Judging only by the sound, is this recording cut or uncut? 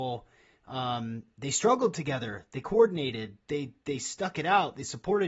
uncut